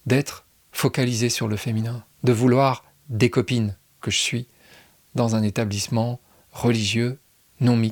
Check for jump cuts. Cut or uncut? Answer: cut